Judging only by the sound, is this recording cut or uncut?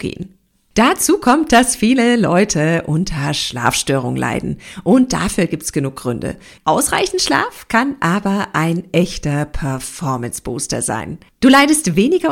cut